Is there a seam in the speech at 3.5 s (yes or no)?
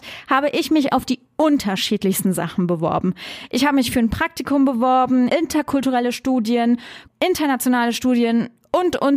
no